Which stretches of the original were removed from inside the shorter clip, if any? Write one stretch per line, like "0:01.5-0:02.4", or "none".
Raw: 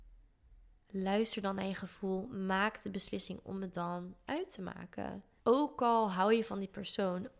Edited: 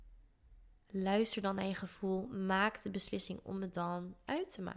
none

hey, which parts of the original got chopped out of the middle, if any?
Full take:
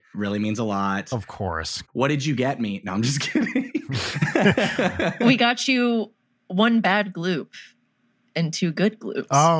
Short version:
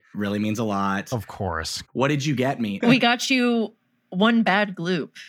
0:02.8-0:05.2

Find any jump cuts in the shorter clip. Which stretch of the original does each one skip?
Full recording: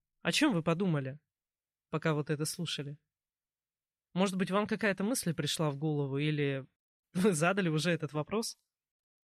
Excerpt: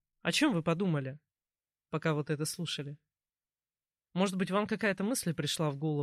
none

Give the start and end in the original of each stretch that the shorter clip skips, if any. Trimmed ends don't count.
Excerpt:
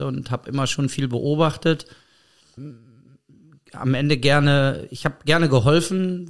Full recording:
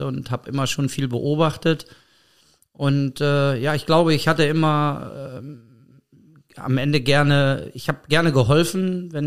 0:02.6-0:05.4

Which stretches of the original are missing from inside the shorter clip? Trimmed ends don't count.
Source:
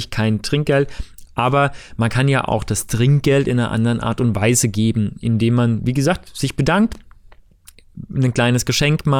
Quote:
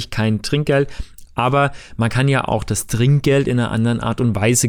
none

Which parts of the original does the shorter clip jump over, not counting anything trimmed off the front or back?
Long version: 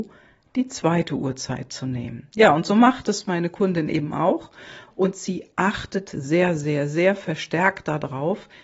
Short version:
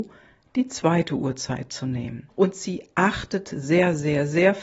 0:02.3-0:04.9

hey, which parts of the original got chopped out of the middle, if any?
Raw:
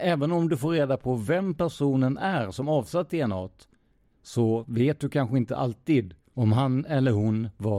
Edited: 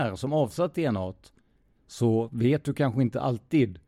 none

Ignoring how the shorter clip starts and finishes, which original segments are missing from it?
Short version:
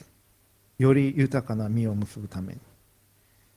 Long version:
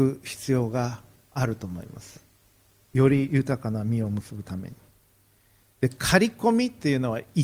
none

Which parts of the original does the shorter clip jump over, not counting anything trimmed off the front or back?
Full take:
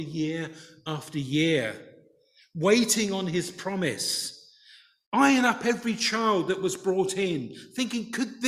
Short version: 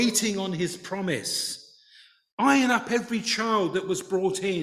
none

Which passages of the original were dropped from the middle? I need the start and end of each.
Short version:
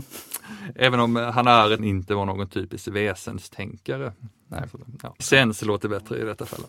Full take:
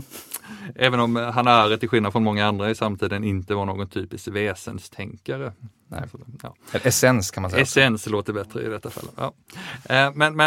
0:01.8-0:03.2
0:06.6-0:07.6

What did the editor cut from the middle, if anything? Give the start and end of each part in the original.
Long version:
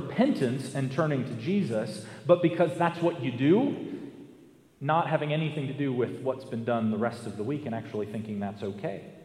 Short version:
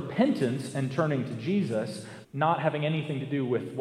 0:02.2-0:04.7

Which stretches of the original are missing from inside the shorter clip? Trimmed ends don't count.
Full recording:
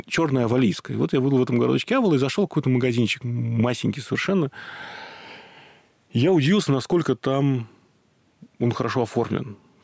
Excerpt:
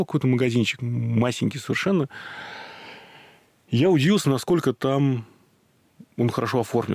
none

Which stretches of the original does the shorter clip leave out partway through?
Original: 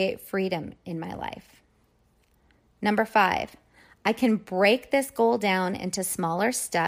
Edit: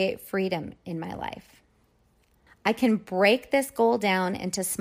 0:02.5-0:03.9

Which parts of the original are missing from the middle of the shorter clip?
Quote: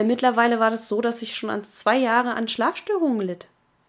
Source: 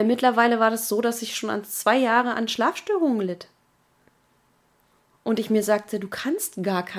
none

